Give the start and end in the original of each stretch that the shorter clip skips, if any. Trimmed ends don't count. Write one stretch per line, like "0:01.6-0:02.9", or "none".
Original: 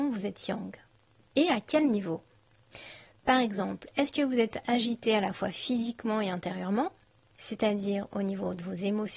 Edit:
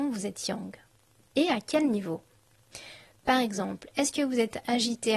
none